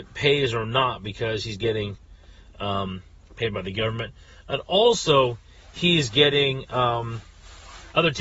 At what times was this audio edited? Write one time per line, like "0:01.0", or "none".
none